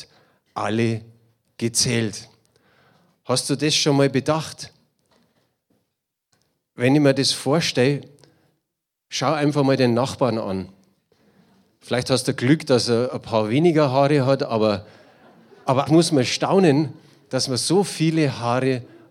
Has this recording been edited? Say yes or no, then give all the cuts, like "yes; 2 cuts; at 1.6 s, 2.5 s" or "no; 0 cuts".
yes; 1 cut; at 15.9 s